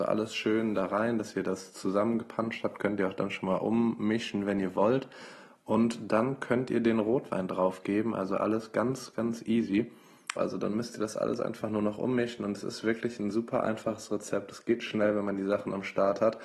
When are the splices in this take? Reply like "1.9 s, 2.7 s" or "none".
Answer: 10.4 s